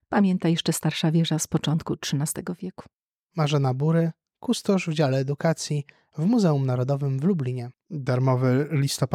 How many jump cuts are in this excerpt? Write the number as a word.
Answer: zero